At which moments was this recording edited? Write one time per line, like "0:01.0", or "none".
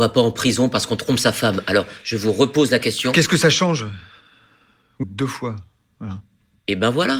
0:05.0